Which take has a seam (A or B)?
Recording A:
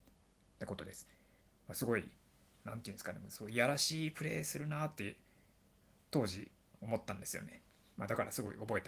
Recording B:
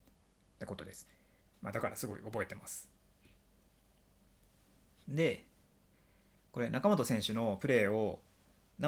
B